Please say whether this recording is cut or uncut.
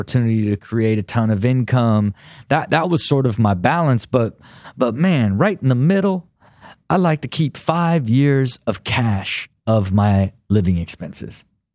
uncut